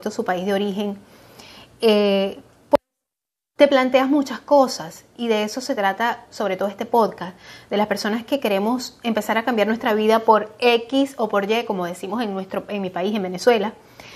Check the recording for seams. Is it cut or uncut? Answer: uncut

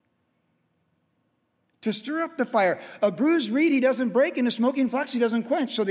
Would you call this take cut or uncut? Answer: uncut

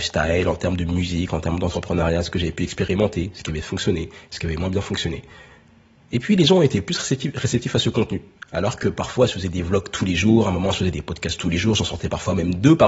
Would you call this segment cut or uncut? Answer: uncut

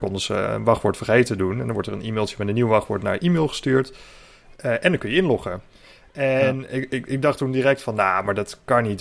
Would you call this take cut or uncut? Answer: uncut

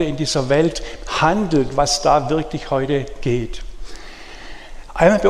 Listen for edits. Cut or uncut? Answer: uncut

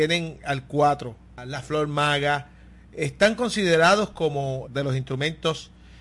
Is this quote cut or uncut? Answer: cut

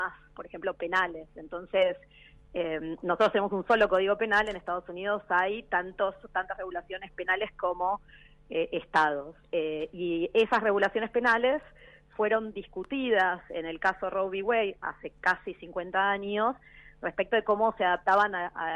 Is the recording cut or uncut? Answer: uncut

